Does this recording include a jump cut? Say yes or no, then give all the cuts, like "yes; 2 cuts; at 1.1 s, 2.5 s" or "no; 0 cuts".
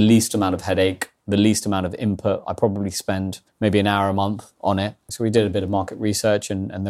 yes; 2 cuts; at 3.5 s, 5.1 s